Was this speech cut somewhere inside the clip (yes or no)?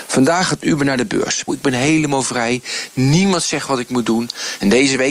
yes